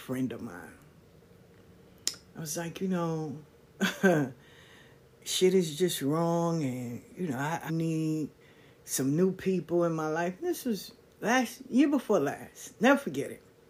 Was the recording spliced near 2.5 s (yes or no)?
no